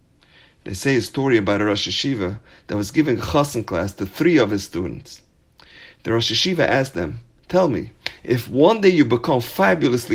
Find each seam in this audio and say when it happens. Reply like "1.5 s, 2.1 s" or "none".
none

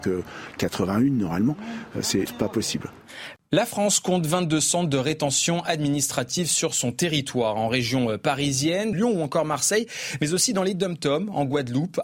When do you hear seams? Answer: 2.3 s, 3.4 s, 8.9 s

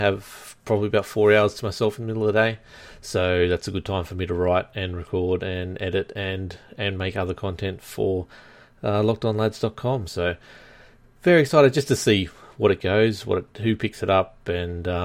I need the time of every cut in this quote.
10.1 s

